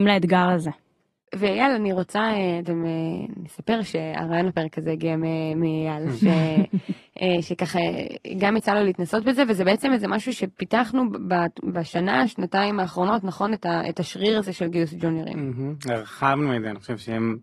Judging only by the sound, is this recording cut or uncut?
uncut